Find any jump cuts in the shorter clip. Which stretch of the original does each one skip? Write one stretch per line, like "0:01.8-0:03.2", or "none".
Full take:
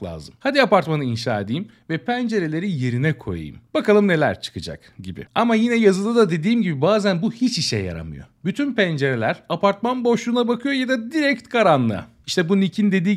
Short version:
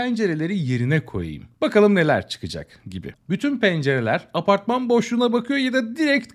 0:05.3-0:08.3